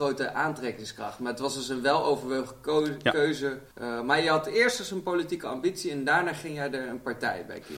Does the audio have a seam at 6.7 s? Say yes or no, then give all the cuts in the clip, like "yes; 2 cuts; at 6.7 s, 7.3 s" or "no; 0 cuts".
no; 1 cut; at 3.7 s